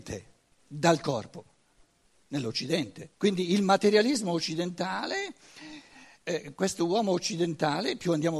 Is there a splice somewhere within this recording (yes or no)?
yes